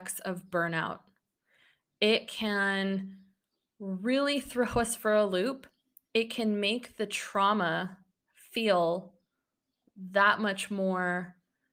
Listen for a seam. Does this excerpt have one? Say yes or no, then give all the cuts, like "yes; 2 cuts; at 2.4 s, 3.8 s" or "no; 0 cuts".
no; 0 cuts